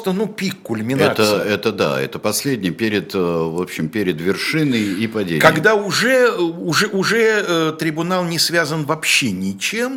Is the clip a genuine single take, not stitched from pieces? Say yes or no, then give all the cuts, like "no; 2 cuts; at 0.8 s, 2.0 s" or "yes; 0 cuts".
yes; 0 cuts